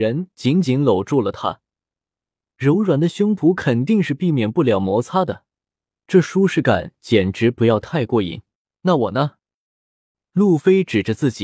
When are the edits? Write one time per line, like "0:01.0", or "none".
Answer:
0:08.6